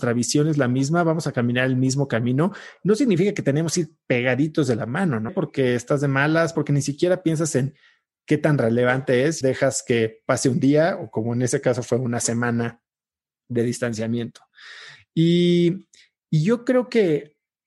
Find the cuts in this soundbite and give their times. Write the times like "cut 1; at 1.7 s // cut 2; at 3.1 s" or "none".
cut 1; at 5.3 s // cut 2; at 6.5 s // cut 3; at 9.4 s